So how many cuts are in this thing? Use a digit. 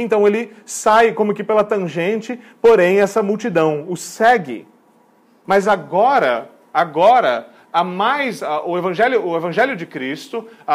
1